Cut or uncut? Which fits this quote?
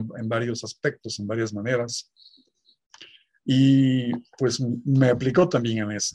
uncut